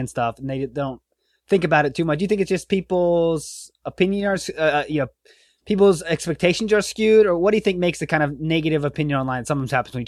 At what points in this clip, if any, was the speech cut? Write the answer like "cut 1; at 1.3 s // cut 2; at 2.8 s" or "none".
none